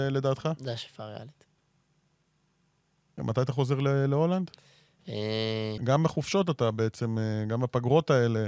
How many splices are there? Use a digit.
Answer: 2